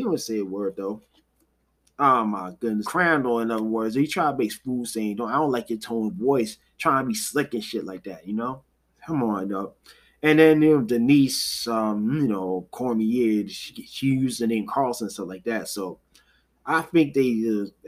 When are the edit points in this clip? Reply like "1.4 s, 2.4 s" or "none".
2.8 s